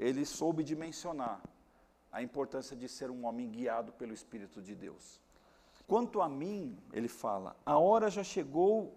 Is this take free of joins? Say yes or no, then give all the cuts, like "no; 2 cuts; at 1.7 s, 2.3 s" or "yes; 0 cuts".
no; 1 cut; at 5.8 s